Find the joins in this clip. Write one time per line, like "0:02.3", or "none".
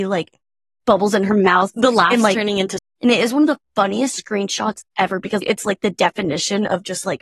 0:02.8
0:05.4